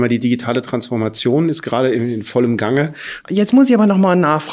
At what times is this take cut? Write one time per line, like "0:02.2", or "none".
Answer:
0:03.2

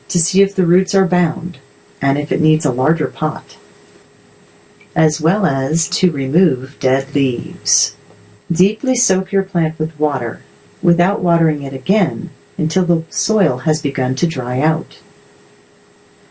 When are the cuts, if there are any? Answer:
0:08.4

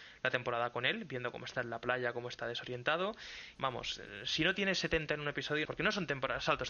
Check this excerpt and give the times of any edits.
0:03.6
0:05.7

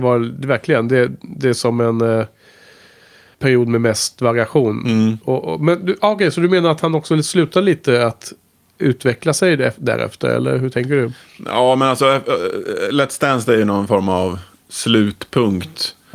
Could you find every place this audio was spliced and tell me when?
0:03.3

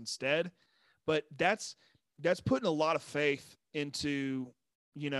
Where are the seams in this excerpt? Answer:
none

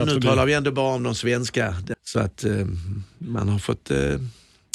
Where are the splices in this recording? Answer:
0:01.9

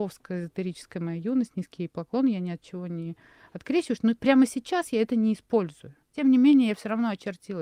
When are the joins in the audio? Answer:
none

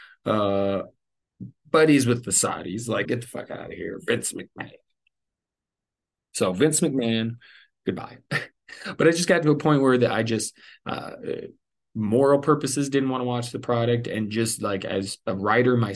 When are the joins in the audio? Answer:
0:03.0

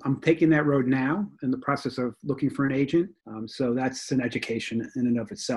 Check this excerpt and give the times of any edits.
0:01.4
0:03.2

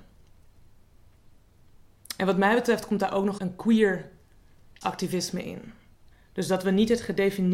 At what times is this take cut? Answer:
0:03.4
0:06.1

